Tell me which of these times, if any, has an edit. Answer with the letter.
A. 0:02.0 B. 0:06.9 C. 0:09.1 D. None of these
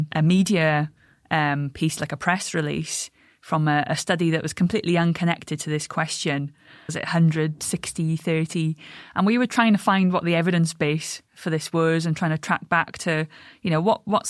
B